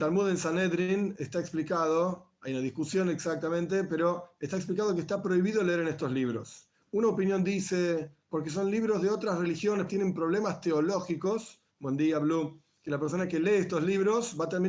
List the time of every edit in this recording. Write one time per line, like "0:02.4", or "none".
0:09.9
0:11.7